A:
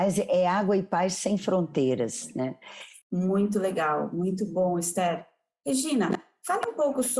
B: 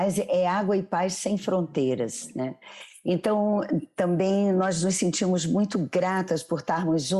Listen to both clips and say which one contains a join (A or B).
A